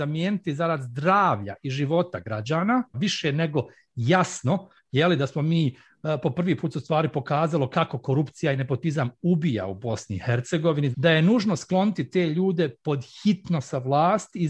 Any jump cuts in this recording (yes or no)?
yes